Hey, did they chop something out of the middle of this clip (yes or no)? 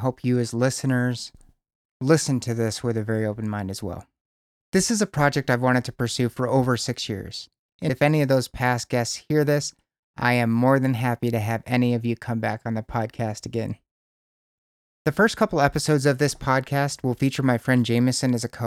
yes